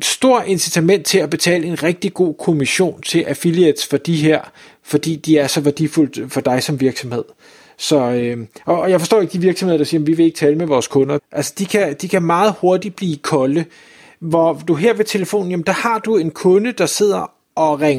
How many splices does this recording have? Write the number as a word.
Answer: one